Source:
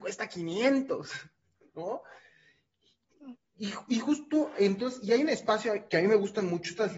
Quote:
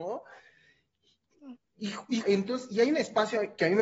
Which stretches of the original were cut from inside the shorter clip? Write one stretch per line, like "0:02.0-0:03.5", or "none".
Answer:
0:04.0-0:04.5